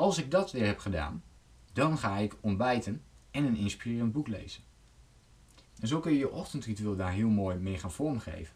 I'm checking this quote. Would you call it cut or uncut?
cut